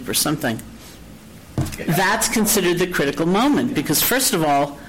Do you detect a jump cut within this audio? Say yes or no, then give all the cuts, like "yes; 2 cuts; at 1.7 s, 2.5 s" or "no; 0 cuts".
yes; 1 cut; at 1.8 s